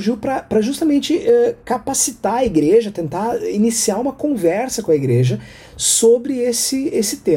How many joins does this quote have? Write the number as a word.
zero